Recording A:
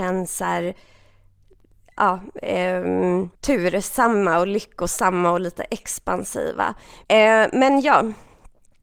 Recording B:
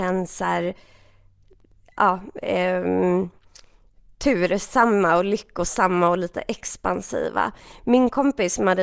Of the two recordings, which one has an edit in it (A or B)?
A